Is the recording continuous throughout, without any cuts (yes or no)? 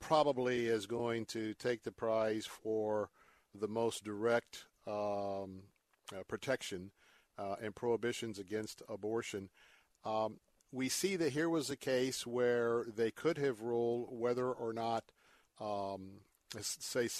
yes